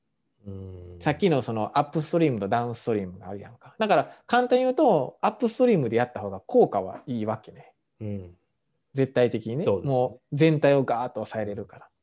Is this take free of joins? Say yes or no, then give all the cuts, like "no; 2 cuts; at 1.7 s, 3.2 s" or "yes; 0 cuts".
yes; 0 cuts